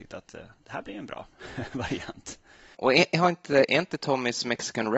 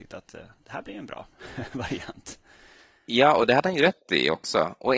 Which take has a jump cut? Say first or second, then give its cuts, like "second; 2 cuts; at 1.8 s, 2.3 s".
first; 1 cut; at 2.8 s